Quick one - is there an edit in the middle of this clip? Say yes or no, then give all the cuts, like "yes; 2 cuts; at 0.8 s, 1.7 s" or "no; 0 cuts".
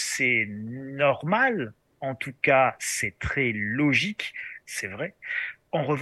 yes; 1 cut; at 4.6 s